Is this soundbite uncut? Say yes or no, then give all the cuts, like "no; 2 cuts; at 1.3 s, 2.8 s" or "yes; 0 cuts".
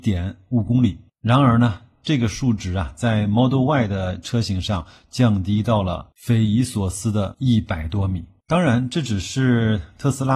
yes; 0 cuts